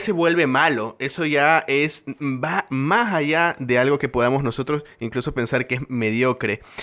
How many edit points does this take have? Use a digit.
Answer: 0